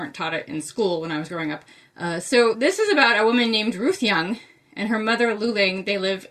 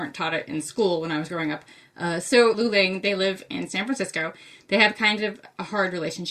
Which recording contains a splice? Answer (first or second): second